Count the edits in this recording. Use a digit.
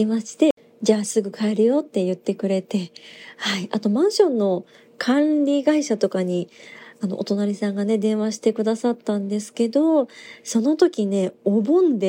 0